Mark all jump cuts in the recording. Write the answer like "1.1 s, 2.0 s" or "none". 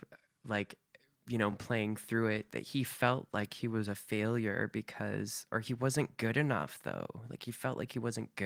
none